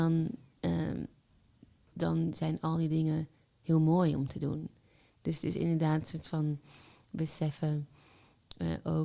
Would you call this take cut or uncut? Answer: cut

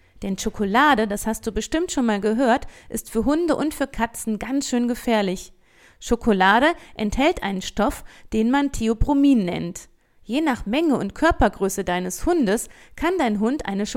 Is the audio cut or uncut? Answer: uncut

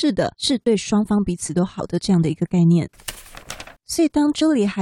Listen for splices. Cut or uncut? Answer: cut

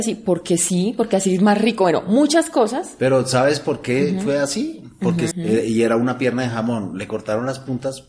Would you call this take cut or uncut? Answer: cut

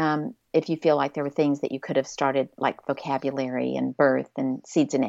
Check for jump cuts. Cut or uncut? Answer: uncut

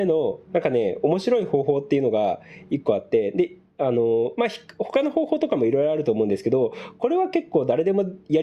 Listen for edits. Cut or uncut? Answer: uncut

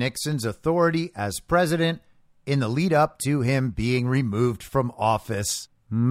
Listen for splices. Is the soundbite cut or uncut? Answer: uncut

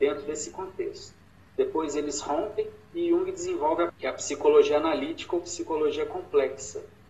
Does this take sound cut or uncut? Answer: cut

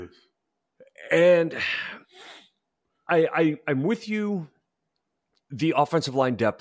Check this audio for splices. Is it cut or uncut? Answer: uncut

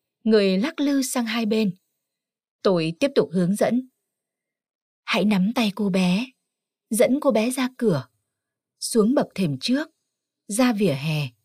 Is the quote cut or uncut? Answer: uncut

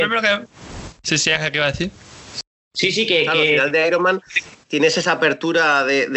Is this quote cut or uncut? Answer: uncut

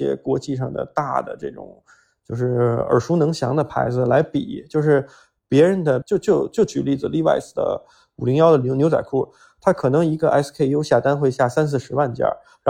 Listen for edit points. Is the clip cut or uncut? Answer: cut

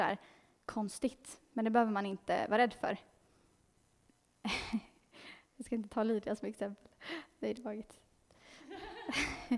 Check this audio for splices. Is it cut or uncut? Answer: uncut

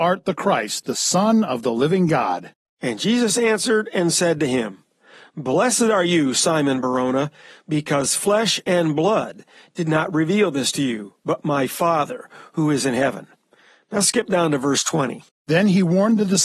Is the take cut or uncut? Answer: uncut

